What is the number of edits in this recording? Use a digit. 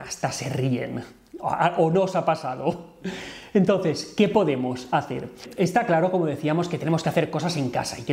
0